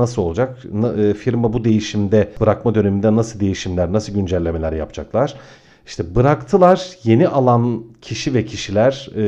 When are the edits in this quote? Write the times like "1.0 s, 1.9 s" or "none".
none